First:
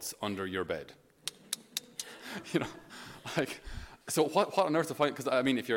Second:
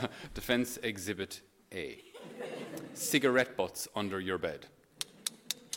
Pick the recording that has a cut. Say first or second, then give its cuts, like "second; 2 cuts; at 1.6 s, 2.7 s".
first; 1 cut; at 4.0 s